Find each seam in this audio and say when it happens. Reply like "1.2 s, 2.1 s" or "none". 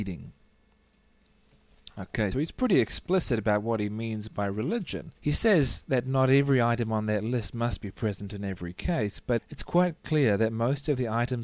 2.3 s, 5.2 s, 9.4 s